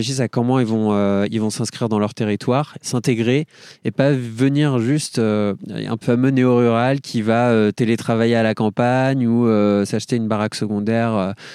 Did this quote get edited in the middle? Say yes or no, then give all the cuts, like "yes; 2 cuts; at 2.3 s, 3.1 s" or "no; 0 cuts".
yes; 1 cut; at 6.0 s